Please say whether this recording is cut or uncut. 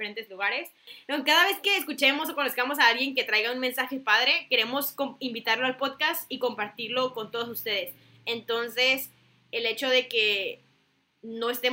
uncut